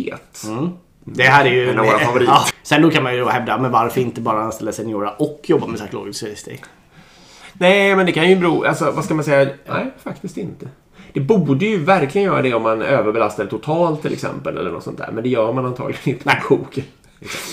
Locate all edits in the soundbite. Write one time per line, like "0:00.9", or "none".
0:02.5
0:09.7